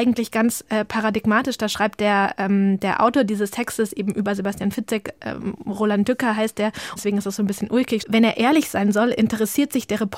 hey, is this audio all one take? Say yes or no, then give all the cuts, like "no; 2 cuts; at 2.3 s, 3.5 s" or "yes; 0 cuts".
no; 2 cuts; at 7.0 s, 8.0 s